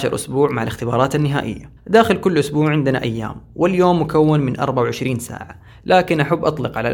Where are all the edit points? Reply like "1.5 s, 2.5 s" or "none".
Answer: 1.8 s